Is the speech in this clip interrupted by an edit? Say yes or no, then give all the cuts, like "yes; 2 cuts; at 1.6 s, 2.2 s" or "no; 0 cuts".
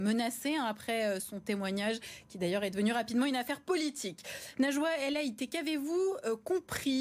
no; 0 cuts